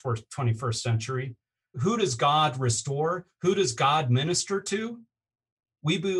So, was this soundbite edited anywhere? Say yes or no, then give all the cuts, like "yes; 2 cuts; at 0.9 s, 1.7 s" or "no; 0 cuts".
yes; 1 cut; at 1.7 s